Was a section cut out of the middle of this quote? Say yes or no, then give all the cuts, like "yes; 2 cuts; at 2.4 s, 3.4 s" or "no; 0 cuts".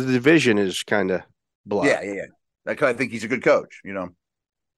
no; 0 cuts